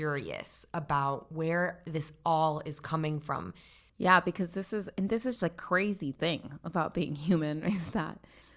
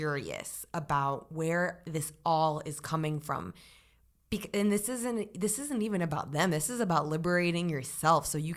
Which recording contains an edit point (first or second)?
first